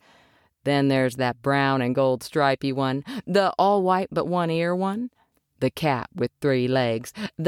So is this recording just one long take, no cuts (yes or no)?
yes